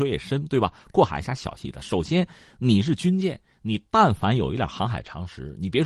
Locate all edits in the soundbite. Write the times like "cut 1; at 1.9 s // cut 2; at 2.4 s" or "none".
cut 1; at 1.6 s